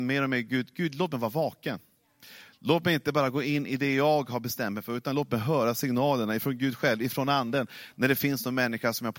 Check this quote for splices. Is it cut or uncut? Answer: uncut